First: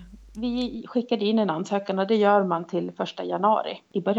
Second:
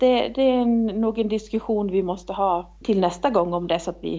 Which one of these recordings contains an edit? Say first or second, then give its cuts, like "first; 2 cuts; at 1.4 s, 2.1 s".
second; 1 cut; at 2.8 s